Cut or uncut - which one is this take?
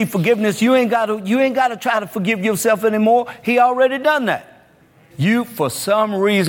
cut